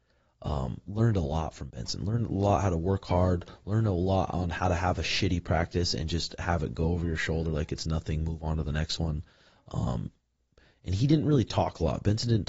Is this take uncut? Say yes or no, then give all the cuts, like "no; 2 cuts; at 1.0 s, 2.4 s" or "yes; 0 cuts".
yes; 0 cuts